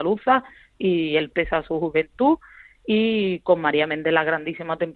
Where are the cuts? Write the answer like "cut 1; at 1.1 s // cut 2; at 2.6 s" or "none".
cut 1; at 1.3 s

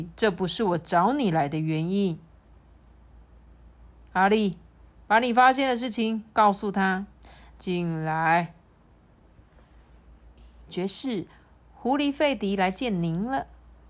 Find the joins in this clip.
cut 1; at 7.5 s // cut 2; at 10.7 s

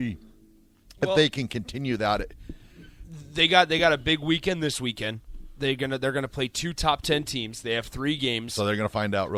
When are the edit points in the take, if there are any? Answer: none

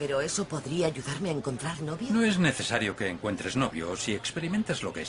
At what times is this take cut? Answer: none

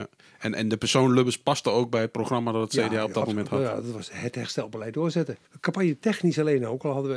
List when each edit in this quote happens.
cut 1; at 5.4 s

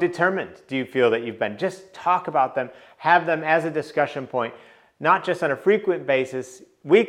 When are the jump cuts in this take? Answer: none

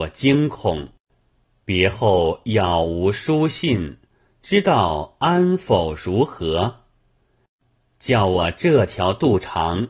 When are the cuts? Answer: none

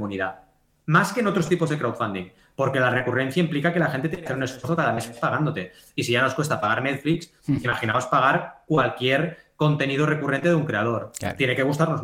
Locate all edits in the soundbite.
none

